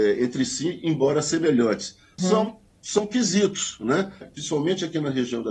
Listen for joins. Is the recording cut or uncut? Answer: cut